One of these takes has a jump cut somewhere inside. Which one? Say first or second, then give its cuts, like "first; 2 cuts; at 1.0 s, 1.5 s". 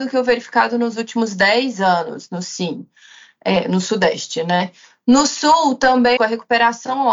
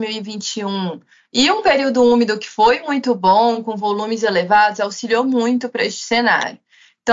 first; 1 cut; at 6.2 s